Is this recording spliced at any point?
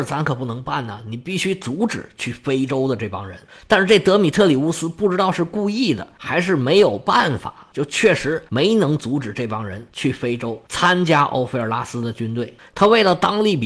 yes; 1 cut; at 12.7 s

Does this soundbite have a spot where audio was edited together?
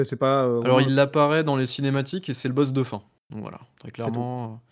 no; 0 cuts

